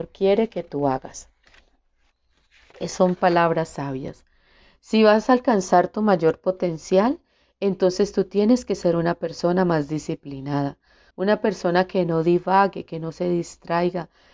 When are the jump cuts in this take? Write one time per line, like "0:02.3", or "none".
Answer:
0:11.1